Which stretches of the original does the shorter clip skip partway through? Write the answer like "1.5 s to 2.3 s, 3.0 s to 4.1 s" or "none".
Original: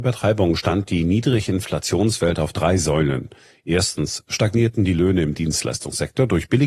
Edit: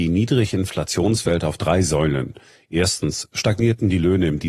none